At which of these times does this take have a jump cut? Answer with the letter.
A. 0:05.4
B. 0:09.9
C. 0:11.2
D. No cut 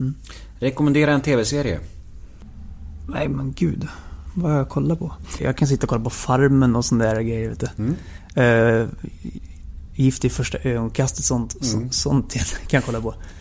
A